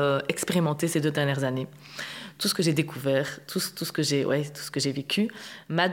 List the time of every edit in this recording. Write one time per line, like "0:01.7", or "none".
none

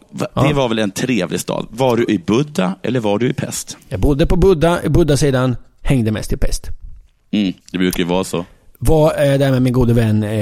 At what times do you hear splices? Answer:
0:07.6

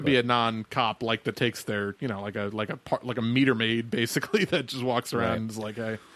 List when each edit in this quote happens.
0:01.3

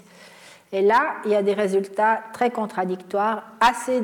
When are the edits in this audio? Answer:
none

